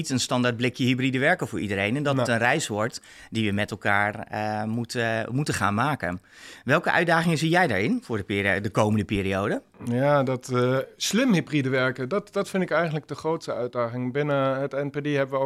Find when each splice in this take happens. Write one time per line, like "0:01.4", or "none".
none